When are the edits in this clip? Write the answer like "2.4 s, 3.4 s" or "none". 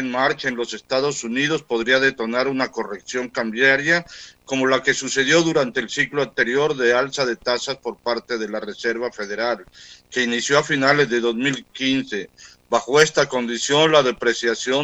none

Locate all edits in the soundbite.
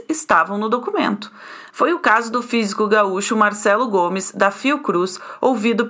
1.7 s

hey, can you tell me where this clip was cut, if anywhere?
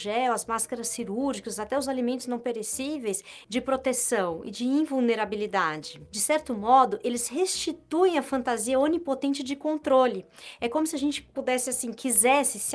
3.4 s

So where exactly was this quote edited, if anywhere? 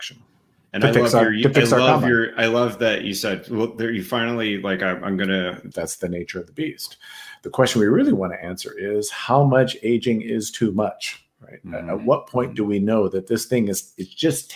5.7 s

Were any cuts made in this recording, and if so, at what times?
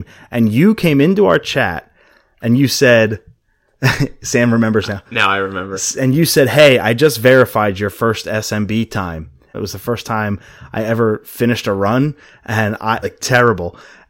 9.5 s, 13.0 s

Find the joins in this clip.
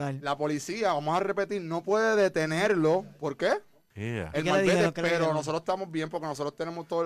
3.9 s

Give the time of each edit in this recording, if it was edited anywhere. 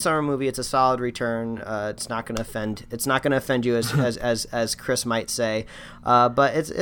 none

